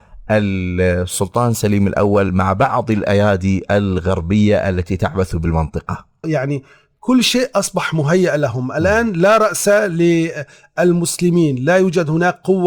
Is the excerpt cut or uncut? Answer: cut